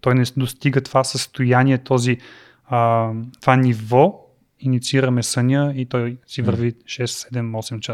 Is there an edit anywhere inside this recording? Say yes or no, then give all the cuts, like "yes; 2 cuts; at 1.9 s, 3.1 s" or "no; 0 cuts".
yes; 1 cut; at 4.6 s